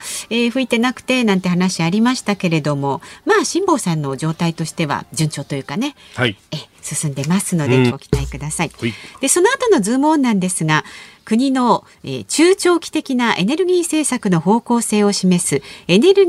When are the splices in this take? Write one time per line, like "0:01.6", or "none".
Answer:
0:07.9